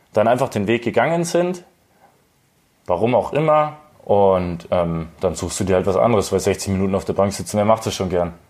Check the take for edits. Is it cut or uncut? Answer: cut